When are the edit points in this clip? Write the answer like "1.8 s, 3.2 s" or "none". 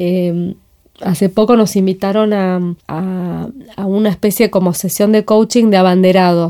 2.8 s